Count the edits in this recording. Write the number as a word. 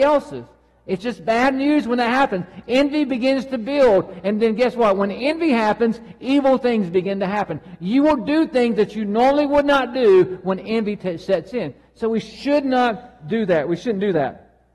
zero